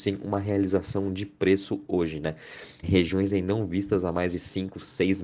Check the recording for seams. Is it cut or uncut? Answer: cut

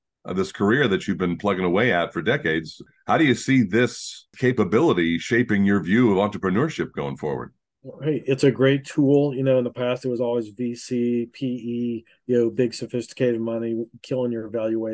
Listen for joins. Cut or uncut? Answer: uncut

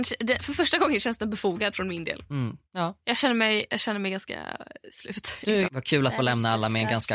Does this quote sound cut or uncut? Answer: cut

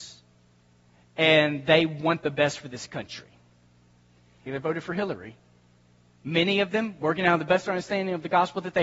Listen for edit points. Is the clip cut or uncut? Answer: cut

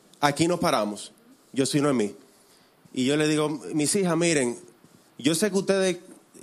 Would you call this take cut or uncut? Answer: uncut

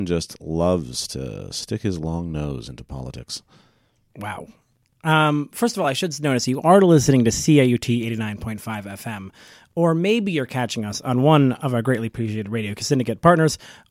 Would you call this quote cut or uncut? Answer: uncut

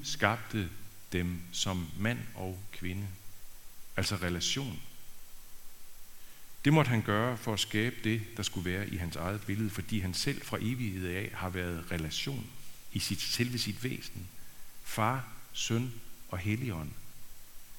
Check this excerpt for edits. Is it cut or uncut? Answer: uncut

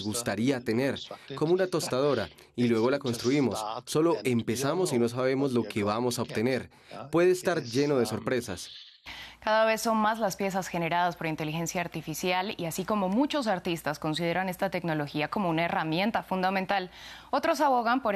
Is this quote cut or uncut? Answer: uncut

